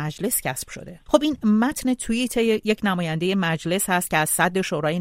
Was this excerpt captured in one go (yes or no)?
no